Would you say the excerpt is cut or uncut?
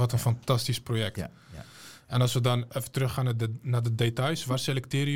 uncut